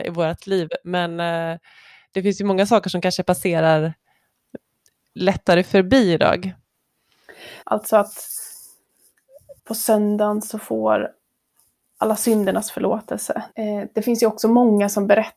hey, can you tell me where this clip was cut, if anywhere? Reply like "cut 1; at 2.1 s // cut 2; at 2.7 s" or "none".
cut 1; at 7.6 s // cut 2; at 9.6 s // cut 3; at 13.5 s